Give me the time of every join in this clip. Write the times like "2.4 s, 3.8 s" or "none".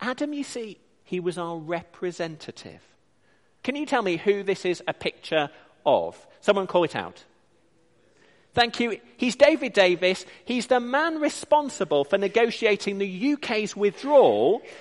1.0 s, 3.6 s

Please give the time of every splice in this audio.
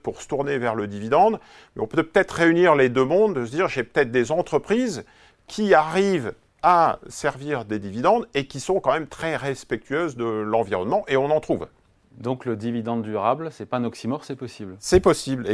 none

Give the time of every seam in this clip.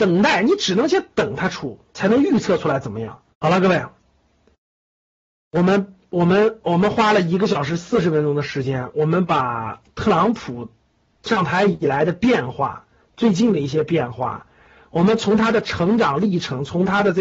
3.3 s

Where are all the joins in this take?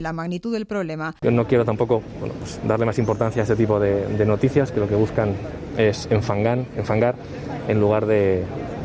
1.2 s

